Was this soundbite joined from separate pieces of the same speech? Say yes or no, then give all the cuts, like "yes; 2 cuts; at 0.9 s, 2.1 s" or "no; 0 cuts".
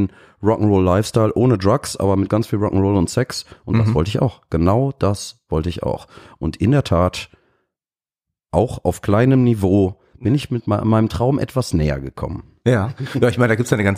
no; 0 cuts